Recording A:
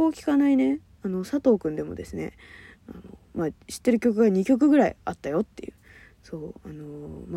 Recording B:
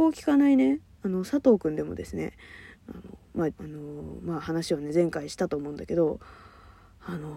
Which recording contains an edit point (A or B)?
B